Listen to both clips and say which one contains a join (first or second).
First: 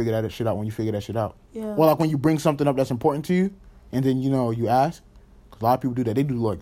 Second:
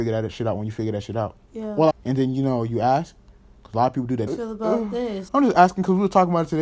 second